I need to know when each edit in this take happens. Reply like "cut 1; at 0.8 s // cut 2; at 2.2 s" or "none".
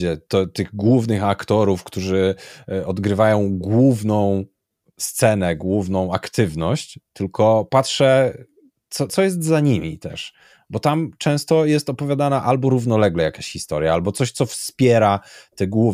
cut 1; at 9.1 s